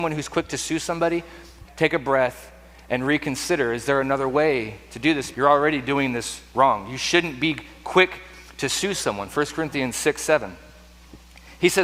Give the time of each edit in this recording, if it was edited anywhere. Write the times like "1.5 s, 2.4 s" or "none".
1.7 s, 5.3 s